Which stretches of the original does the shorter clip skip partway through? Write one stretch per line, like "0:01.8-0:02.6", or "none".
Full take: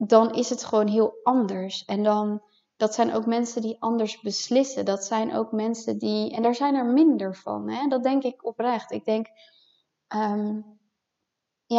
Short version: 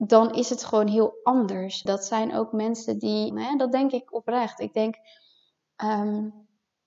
0:01.9-0:04.8
0:06.3-0:07.6

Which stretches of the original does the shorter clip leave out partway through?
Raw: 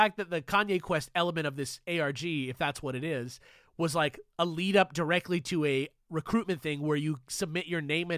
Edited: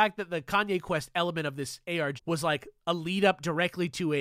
0:02.2-0:03.7

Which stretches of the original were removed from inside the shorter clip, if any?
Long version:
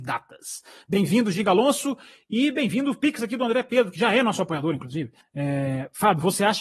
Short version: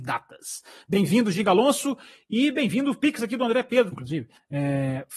0:03.9-0:04.8

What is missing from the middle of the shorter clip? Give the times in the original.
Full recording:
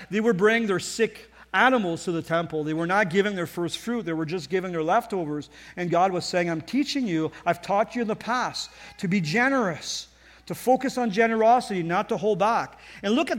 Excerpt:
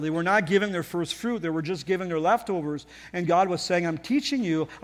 none

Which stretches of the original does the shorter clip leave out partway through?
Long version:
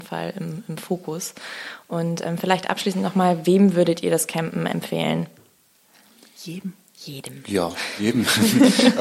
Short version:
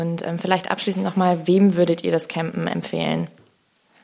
none

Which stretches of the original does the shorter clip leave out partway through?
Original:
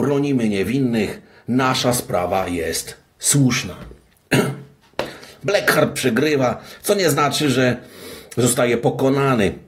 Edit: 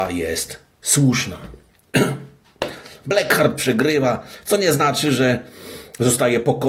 none

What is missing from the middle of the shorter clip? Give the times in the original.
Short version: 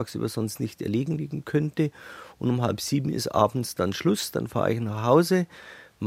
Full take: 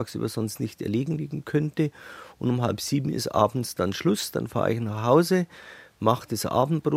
none

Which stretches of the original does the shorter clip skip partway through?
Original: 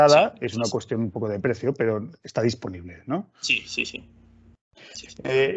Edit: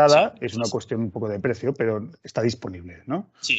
none

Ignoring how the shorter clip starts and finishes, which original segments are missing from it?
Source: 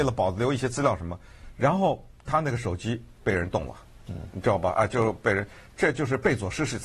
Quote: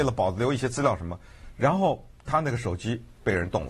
none

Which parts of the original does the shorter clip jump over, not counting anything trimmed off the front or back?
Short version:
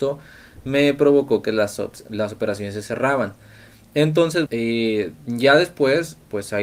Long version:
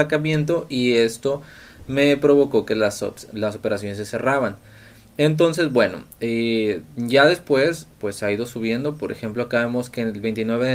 0:05.7-0:06.2

